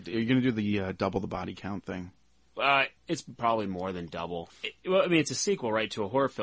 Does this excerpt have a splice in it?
yes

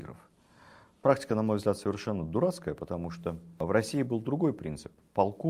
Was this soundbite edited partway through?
no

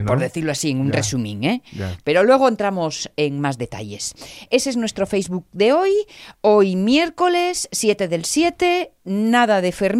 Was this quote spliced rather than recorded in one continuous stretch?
no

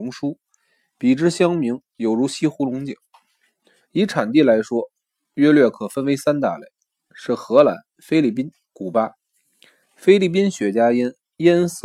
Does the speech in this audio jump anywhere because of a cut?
yes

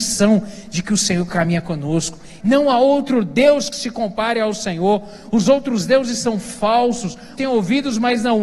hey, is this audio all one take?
no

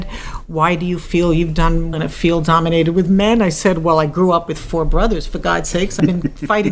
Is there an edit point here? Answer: yes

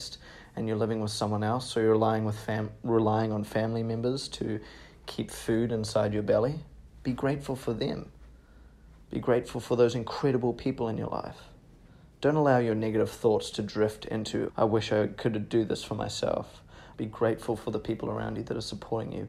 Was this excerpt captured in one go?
no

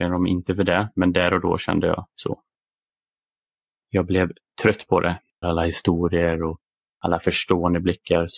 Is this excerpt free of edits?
no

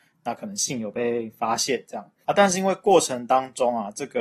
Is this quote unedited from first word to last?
no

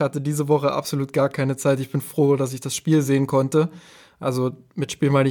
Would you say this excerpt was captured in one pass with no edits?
yes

